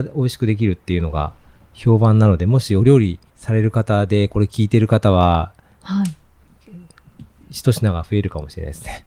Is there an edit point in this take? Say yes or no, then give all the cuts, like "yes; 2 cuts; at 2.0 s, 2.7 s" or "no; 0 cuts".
yes; 2 cuts; at 3.3 s, 5.8 s